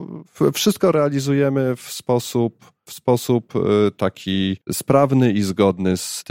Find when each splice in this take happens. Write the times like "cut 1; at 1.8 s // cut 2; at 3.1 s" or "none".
cut 1; at 2.9 s // cut 2; at 4.6 s